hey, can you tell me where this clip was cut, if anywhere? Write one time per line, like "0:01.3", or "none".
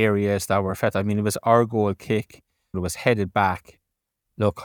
0:02.7